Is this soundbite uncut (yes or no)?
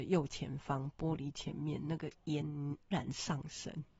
no